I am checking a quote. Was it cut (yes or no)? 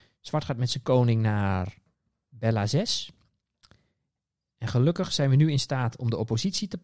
no